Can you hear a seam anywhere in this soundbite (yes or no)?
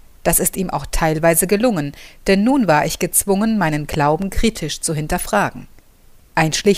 no